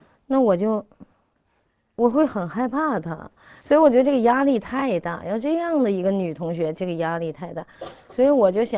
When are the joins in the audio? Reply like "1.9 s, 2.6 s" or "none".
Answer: 3.6 s